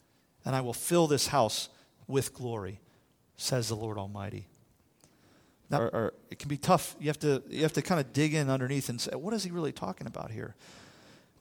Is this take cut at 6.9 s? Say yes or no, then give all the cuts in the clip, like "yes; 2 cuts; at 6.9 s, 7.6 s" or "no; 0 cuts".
no; 1 cut; at 5.7 s